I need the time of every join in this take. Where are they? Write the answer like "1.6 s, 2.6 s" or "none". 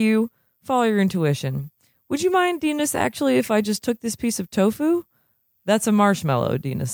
none